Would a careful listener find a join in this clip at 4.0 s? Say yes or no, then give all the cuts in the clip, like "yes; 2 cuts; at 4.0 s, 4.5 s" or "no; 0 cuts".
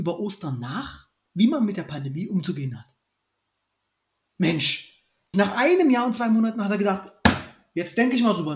no; 1 cut; at 5.3 s